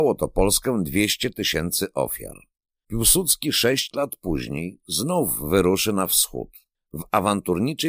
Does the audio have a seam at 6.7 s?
yes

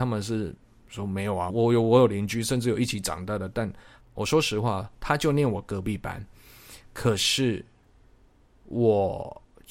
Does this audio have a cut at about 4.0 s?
yes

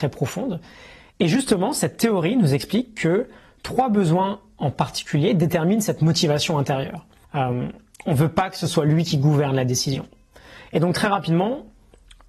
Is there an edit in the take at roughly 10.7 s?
no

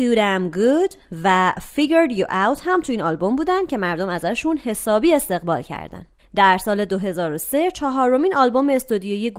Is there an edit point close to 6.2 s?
yes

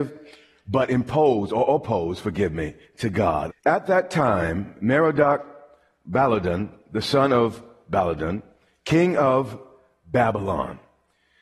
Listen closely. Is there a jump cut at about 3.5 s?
yes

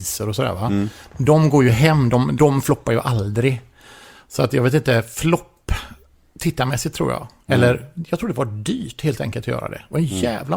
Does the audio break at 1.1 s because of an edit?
no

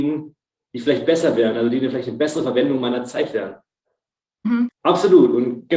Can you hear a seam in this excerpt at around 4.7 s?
yes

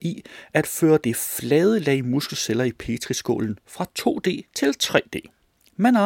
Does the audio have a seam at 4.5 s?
yes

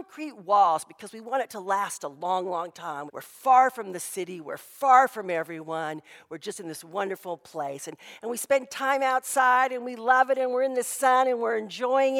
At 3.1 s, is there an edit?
yes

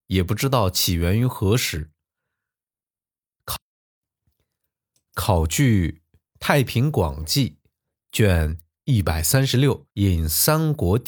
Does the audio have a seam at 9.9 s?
yes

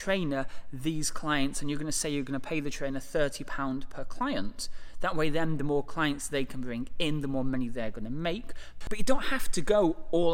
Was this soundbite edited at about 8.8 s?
yes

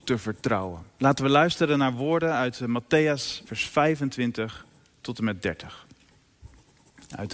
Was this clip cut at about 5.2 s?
no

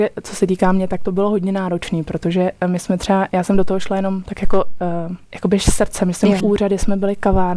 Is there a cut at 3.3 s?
no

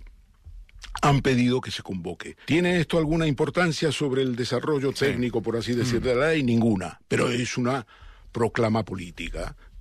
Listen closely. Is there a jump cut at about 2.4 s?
yes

